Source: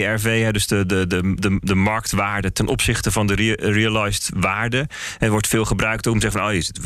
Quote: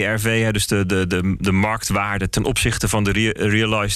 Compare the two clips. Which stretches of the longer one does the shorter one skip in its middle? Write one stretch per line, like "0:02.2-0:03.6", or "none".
0:01.4-0:01.6

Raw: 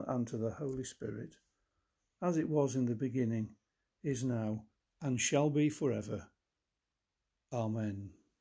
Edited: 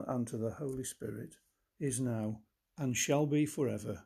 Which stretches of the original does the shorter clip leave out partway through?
0:01.7-0:03.9

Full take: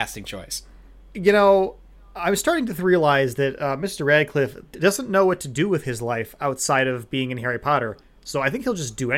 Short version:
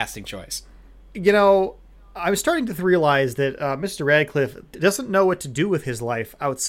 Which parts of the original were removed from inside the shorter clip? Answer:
none

